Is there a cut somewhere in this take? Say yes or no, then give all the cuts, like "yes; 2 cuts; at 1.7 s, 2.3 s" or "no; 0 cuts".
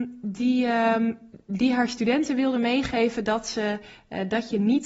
no; 0 cuts